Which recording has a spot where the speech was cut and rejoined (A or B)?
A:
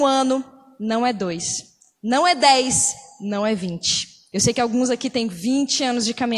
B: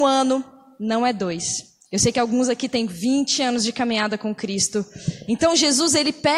B